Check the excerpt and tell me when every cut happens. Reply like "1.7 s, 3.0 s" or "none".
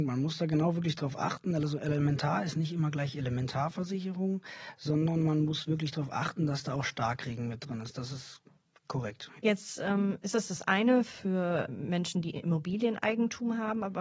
9.4 s, 11.7 s